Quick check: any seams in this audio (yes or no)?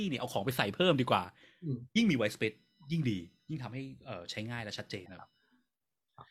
yes